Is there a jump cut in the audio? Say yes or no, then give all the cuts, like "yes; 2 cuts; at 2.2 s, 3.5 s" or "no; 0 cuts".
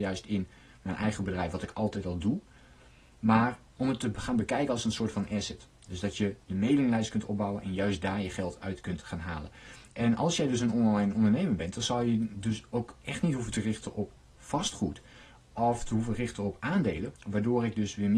yes; 2 cuts; at 3.7 s, 17.2 s